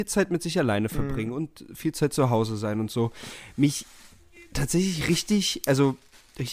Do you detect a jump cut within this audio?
no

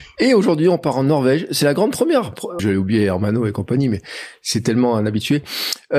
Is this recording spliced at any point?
yes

